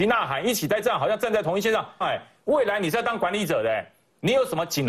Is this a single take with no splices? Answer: no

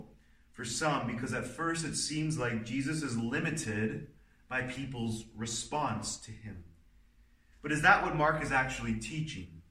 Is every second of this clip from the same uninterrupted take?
no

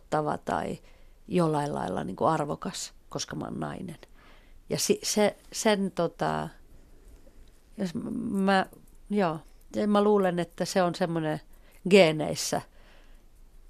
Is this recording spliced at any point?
no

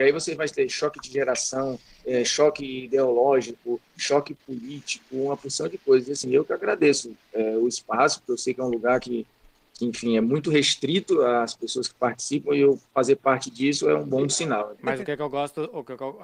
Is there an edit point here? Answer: yes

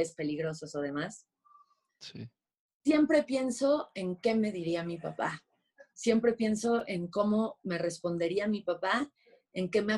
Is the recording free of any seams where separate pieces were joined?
no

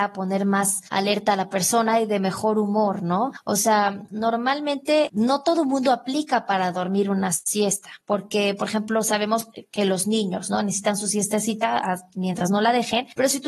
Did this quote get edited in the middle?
yes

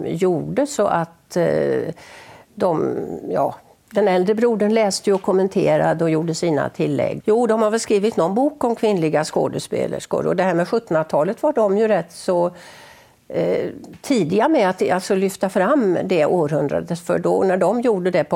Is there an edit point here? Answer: yes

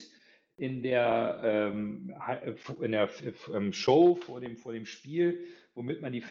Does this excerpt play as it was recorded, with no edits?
yes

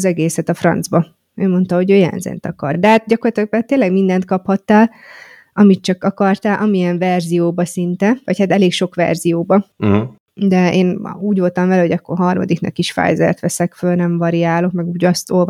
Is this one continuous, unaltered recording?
yes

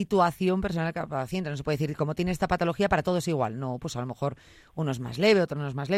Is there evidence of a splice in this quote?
no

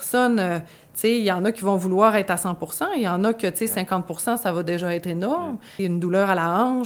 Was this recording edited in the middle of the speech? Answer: yes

